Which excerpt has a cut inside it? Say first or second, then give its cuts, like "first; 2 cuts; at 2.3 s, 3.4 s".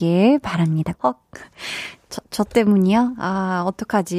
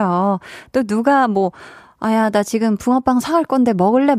first; 1 cut; at 0.9 s